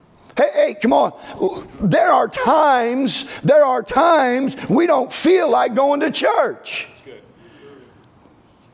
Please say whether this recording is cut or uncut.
uncut